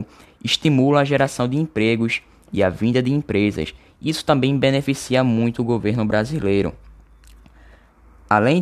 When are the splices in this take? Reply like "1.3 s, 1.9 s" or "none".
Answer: none